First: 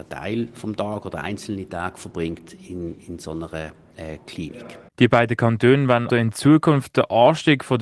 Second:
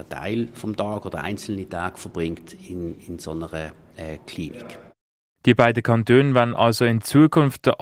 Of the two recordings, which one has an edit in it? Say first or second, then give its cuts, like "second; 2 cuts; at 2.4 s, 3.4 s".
first; 2 cuts; at 4.9 s, 6.1 s